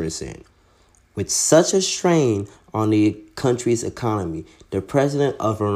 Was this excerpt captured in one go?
yes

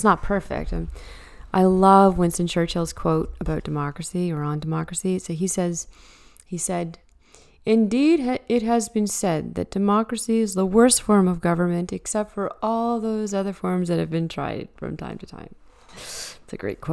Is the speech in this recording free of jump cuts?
yes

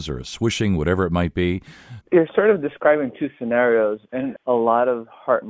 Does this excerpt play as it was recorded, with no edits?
no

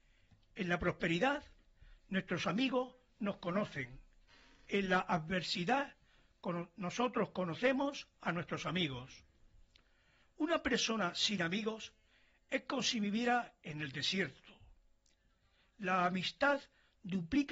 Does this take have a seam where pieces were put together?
no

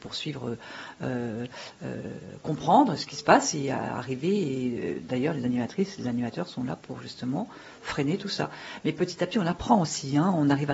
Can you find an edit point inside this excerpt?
no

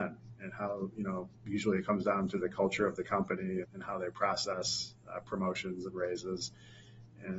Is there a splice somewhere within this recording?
yes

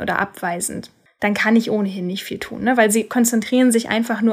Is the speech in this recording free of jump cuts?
yes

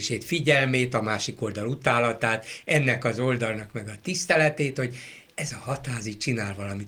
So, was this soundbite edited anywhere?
no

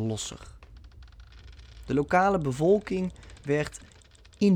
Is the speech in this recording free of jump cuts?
yes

